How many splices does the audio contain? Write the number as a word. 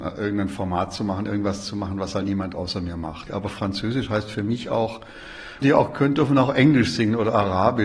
two